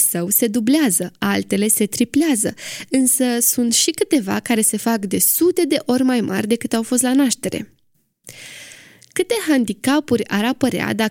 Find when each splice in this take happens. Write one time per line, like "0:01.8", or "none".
none